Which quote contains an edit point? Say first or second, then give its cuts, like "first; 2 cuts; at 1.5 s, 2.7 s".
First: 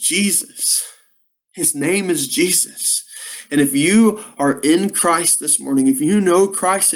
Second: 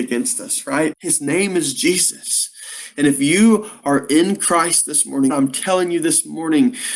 second; 2 cuts; at 0.9 s, 5.3 s